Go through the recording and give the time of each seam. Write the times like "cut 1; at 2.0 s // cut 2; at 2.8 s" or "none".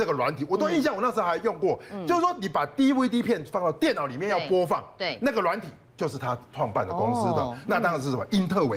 none